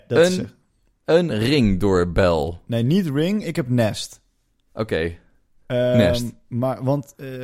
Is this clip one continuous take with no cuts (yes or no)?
yes